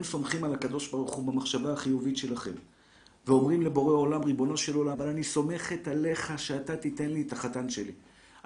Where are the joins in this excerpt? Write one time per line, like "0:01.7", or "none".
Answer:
0:04.9
0:07.3